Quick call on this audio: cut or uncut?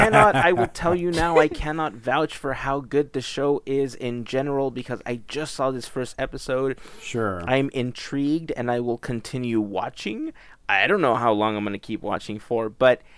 uncut